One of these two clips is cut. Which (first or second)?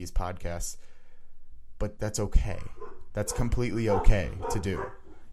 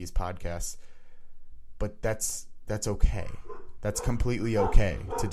first